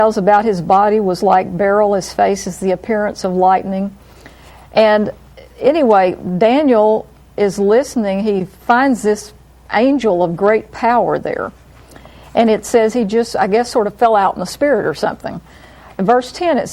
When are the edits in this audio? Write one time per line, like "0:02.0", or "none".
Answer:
none